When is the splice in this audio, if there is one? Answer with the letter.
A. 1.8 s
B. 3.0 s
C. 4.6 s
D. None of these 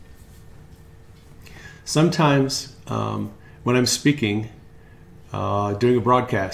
D